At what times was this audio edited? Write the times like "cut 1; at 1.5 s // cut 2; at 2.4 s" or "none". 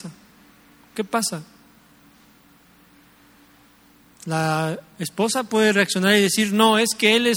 none